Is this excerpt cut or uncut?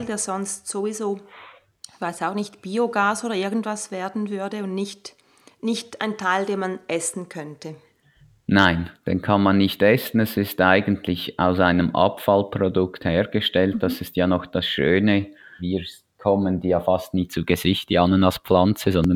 cut